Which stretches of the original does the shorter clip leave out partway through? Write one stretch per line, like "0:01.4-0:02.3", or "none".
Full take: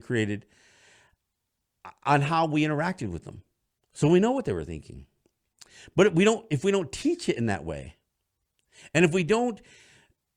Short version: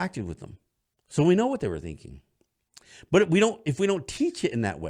none